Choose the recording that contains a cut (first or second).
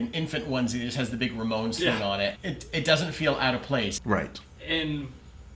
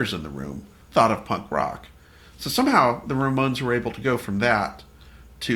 first